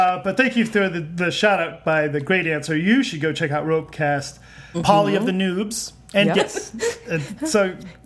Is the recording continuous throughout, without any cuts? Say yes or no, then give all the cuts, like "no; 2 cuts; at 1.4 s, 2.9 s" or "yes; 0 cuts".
no; 2 cuts; at 4.7 s, 6.3 s